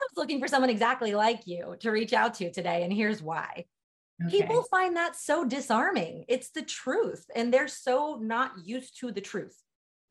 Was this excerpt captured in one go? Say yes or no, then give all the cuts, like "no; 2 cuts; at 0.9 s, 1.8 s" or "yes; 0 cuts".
yes; 0 cuts